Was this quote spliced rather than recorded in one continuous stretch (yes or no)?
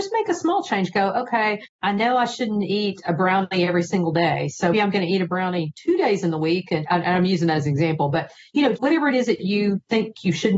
yes